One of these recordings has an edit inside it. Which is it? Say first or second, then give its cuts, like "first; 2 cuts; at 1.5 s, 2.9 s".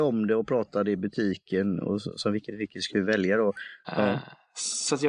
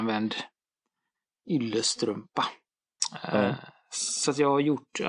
first; 1 cut; at 3.8 s